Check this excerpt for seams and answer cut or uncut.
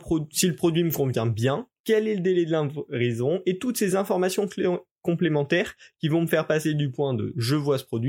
cut